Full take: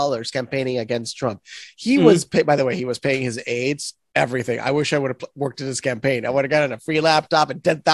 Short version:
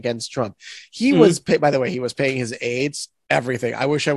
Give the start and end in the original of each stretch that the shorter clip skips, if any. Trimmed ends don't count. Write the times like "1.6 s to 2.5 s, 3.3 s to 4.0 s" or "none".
none